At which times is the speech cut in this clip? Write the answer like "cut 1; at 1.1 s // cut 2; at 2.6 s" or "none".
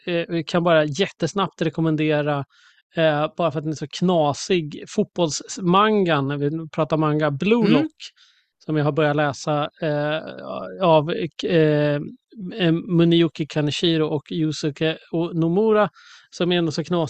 none